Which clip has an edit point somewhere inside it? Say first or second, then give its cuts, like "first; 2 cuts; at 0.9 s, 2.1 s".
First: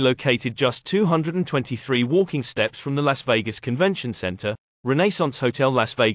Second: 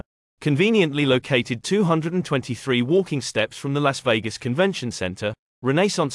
second; 1 cut; at 1.6 s